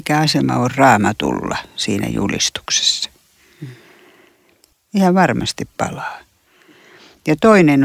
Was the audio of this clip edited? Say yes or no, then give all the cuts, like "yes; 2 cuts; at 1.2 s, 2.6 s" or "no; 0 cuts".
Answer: yes; 1 cut; at 4.7 s